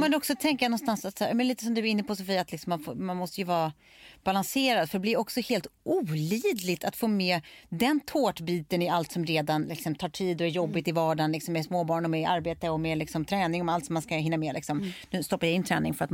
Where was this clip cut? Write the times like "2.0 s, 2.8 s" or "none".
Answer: none